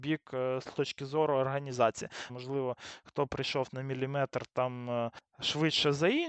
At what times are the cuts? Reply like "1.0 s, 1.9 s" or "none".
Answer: 2.3 s